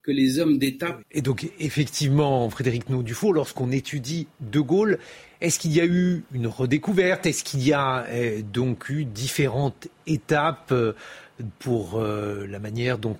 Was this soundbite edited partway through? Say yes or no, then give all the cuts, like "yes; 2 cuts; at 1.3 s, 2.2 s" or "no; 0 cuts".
yes; 1 cut; at 1.0 s